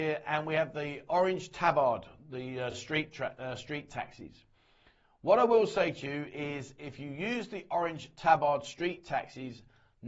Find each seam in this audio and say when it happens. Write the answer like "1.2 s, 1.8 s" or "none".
none